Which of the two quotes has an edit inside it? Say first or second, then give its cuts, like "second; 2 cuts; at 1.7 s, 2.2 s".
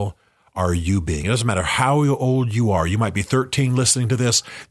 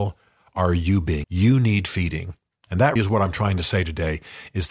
second; 2 cuts; at 1.2 s, 3.0 s